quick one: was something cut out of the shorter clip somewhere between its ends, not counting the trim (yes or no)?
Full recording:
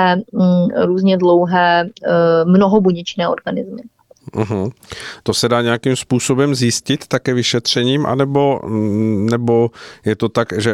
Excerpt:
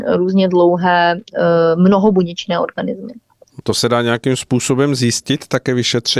yes